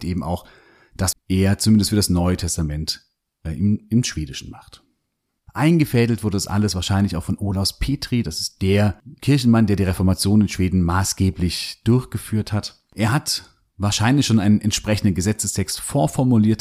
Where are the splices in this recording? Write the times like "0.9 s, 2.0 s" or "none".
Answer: 1.1 s, 5.5 s